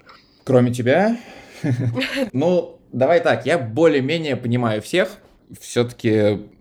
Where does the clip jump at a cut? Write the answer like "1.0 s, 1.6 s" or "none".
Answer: 2.3 s